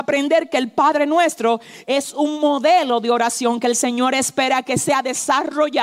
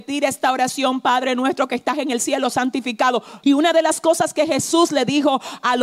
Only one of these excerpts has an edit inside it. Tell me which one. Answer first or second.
second